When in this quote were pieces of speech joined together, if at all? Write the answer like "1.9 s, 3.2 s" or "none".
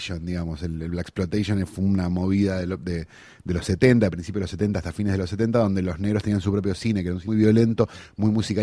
7.3 s